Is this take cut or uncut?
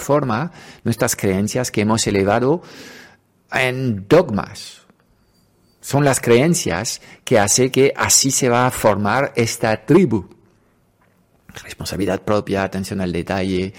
uncut